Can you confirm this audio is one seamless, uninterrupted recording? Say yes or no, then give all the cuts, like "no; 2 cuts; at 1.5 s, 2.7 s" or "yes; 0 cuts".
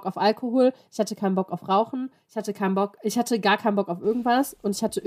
yes; 0 cuts